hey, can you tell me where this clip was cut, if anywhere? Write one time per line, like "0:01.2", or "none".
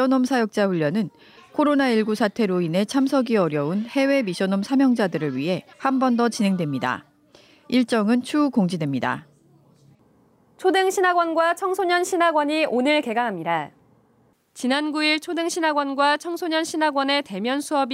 0:05.7